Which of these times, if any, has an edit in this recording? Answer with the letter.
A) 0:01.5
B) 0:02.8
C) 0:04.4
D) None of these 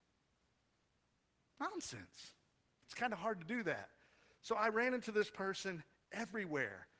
B